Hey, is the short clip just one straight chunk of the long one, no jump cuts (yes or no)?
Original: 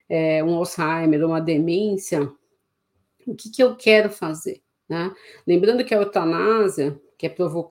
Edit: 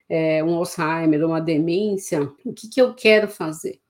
no